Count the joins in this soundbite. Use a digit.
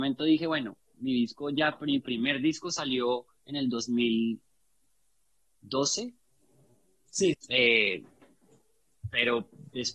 1